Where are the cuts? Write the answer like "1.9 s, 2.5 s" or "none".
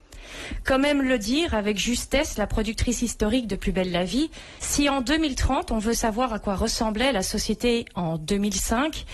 4.6 s